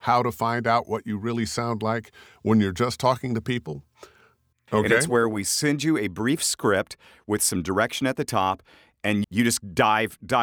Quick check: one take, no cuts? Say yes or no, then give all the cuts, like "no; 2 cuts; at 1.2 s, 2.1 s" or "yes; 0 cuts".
no; 2 cuts; at 4.5 s, 9.2 s